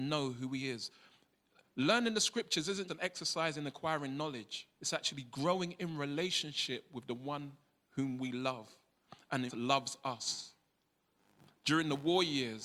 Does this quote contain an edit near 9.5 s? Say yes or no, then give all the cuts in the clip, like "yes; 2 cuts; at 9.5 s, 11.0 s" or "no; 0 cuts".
yes; 3 cuts; at 2.9 s, 4.7 s, 9.5 s